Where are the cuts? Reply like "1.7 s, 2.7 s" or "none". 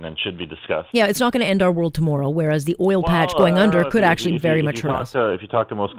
none

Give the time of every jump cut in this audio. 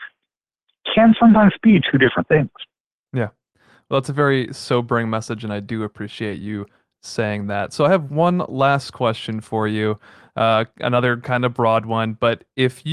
none

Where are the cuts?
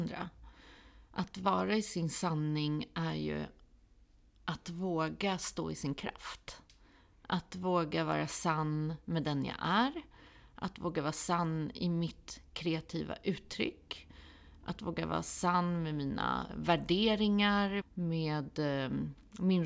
16.5 s, 17.8 s

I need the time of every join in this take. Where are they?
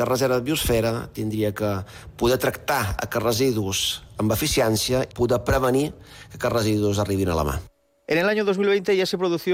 5.1 s

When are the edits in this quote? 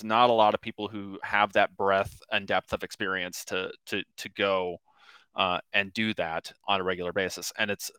6.6 s

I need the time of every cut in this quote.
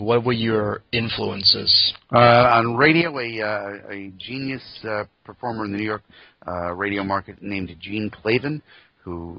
none

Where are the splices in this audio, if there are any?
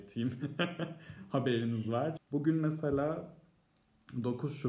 2.2 s

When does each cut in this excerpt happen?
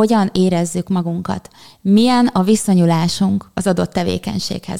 none

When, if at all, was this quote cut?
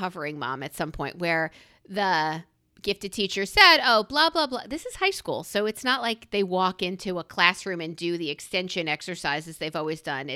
none

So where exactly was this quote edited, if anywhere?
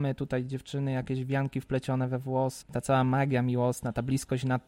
2.6 s

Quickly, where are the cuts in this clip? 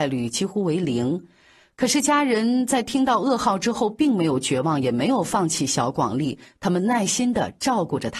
none

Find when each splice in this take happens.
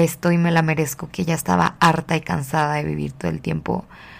none

